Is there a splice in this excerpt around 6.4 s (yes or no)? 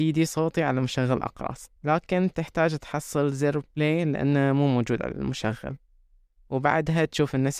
no